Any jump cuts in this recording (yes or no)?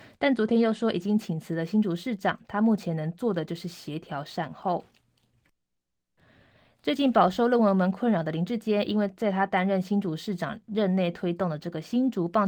no